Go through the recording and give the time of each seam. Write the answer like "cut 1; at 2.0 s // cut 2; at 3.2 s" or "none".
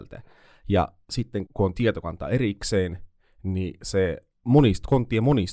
cut 1; at 1.5 s